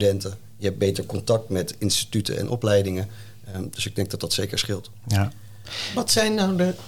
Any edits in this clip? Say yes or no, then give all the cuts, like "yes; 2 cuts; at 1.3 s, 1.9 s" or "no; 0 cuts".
no; 0 cuts